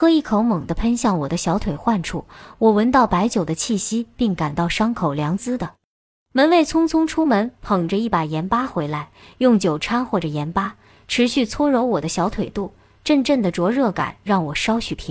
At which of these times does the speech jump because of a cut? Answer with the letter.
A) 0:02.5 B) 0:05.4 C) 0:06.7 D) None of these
B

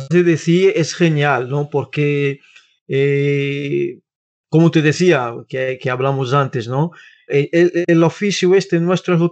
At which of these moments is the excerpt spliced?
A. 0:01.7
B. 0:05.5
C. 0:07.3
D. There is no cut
C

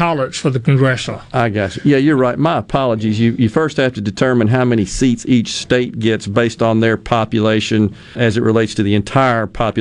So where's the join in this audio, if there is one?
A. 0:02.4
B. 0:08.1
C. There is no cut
B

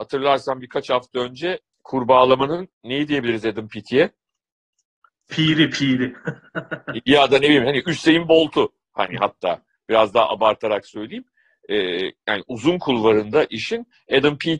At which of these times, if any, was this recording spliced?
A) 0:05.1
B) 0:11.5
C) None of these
C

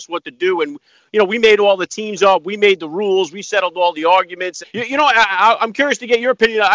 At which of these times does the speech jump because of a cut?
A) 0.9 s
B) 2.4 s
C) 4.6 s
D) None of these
C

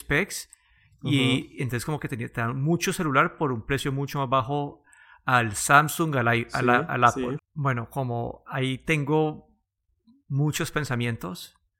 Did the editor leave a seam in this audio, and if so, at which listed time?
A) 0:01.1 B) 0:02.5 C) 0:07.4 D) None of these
C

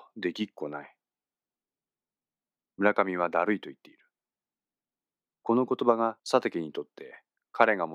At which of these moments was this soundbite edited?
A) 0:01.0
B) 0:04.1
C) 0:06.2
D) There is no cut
C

